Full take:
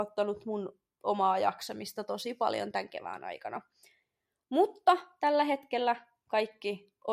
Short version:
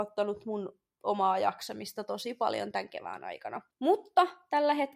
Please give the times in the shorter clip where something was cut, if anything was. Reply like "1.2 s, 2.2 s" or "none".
3.7 s